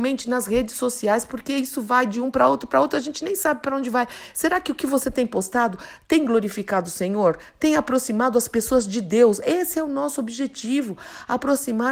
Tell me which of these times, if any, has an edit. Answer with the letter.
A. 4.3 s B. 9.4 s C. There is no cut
C